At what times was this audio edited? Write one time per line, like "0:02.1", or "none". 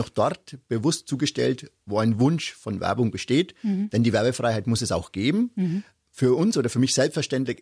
none